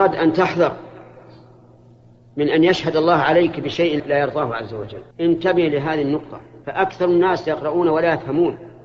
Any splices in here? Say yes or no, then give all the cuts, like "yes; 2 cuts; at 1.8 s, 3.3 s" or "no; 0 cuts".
yes; 3 cuts; at 4.0 s, 5.1 s, 6.6 s